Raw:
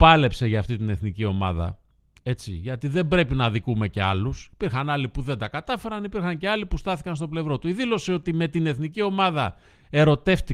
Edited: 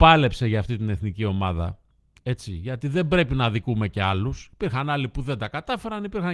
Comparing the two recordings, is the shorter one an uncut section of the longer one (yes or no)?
yes